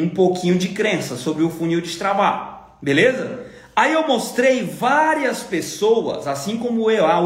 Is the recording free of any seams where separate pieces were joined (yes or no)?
yes